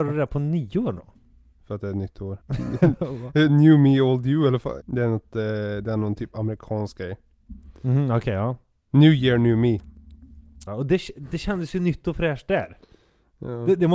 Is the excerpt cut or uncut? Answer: cut